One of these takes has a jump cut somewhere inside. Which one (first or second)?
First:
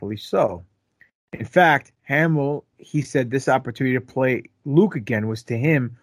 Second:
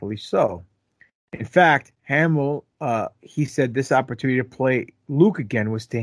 first